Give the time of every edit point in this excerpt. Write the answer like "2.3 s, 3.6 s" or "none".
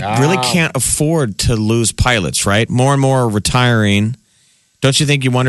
none